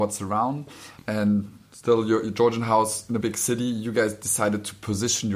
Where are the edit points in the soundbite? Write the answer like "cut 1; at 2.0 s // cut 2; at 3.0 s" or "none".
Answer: cut 1; at 1.0 s // cut 2; at 3.2 s